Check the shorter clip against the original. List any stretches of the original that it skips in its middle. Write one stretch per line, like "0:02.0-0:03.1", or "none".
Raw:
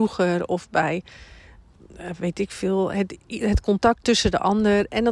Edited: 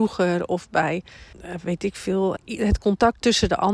0:01.3-0:01.9
0:02.9-0:03.2